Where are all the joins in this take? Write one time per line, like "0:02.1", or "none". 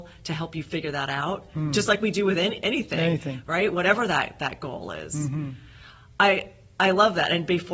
none